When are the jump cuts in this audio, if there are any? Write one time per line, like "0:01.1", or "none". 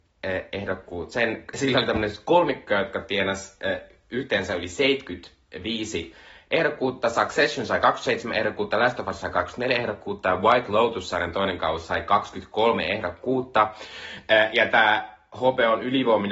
none